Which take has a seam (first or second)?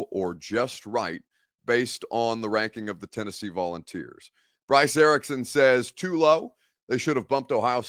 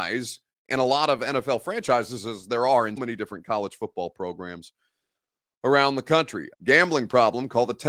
second